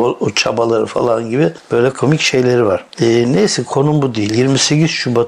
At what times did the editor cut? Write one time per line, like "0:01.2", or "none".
0:01.9